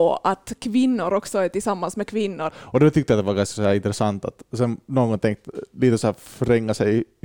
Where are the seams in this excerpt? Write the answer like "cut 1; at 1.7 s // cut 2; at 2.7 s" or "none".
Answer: cut 1; at 2.5 s